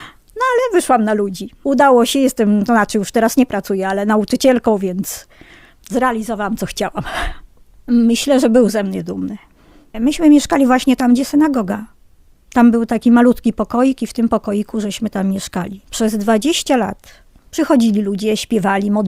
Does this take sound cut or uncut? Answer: cut